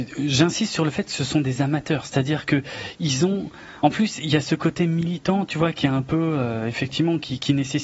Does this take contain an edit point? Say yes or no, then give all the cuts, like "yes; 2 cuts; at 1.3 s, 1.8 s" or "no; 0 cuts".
no; 0 cuts